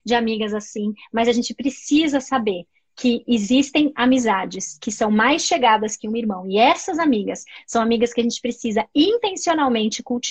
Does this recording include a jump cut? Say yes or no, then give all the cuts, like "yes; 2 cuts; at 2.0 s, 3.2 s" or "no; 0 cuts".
no; 0 cuts